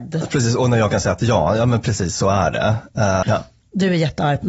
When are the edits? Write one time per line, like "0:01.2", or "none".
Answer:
0:03.2